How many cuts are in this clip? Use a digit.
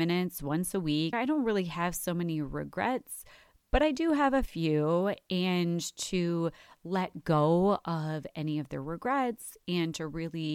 1